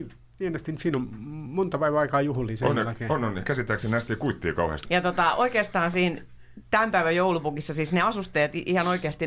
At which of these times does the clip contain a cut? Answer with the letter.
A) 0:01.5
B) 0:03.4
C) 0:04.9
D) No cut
C